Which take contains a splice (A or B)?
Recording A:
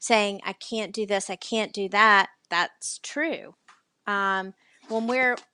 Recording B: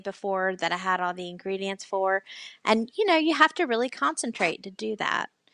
A